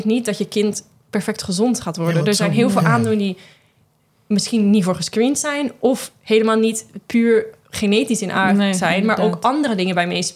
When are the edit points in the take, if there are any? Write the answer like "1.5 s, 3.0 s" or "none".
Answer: none

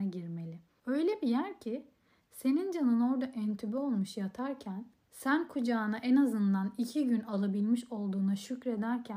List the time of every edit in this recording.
5.1 s

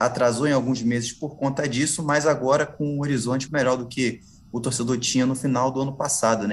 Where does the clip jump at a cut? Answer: 3.5 s

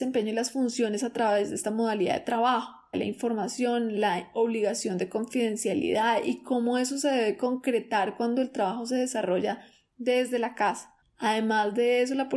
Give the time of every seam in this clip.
2.9 s, 11.0 s

